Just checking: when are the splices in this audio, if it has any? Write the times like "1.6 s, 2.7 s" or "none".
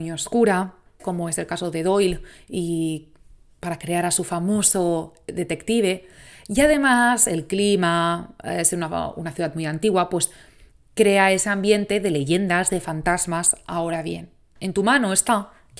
1.0 s

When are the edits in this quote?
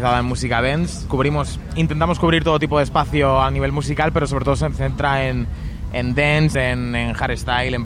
1.1 s, 6.5 s

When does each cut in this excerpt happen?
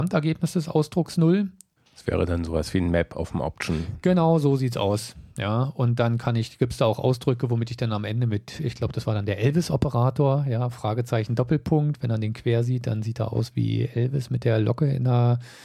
1.8 s

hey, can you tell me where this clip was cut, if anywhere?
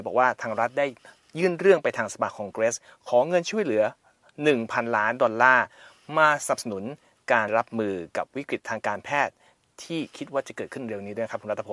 7.5 s

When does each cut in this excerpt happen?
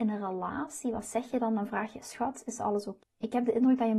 3.0 s

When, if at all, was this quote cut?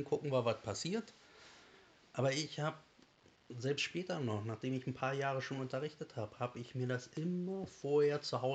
none

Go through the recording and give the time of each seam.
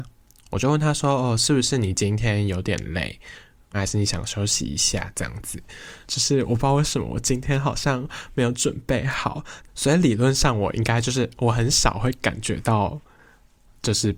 3.7 s, 6.1 s, 9.7 s

